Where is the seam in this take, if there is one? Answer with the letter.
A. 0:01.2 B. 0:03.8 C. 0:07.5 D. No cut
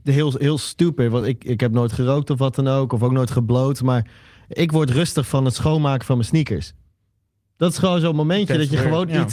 D